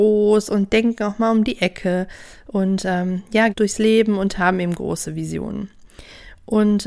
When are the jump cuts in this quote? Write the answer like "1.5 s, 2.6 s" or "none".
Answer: 3.5 s

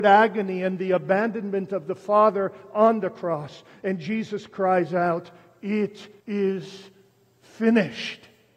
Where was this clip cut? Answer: 6.2 s

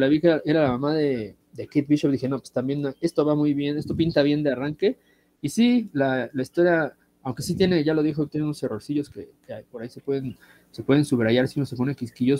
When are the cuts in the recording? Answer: none

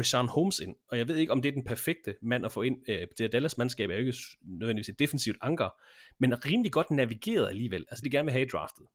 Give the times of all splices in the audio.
8.0 s

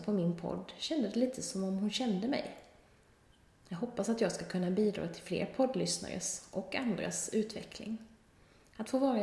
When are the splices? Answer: none

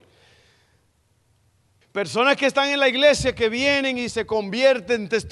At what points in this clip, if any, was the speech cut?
1.8 s

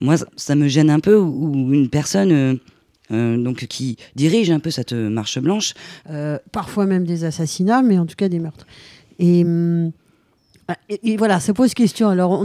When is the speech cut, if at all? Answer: 6.0 s

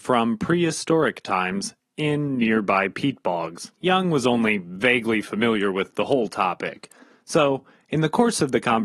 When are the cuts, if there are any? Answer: 3.7 s

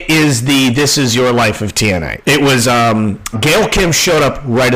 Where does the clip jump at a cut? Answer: 2.2 s, 3.3 s

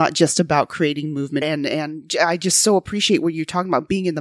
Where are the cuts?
1.4 s

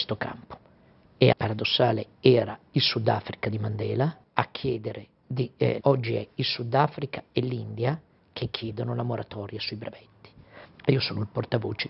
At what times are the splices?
1.3 s, 5.8 s, 10.6 s

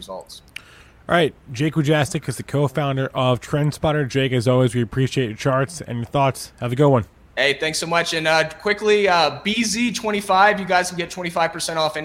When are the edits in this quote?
none

